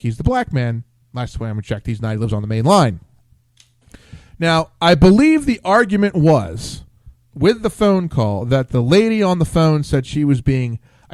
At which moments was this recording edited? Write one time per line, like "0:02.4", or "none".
none